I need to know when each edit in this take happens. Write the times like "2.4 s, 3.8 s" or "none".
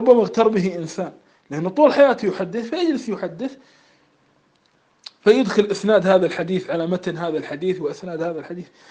none